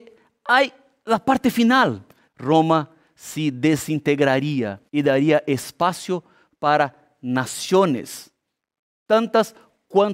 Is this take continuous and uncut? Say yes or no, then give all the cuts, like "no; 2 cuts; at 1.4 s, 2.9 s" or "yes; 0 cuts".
no; 2 cuts; at 2.3 s, 4.9 s